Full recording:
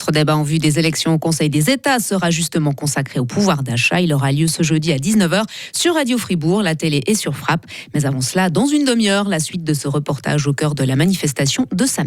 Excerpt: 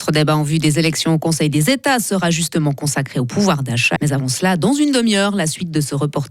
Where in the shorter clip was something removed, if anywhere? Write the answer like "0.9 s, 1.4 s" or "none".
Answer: 4.0 s